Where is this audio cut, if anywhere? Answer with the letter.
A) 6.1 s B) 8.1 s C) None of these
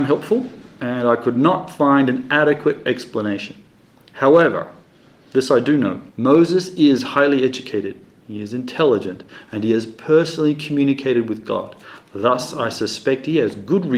A